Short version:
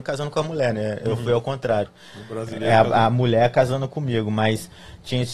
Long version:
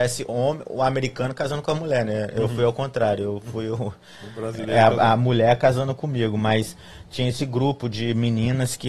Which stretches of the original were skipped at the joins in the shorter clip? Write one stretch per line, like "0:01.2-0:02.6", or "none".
0:03.2-0:03.9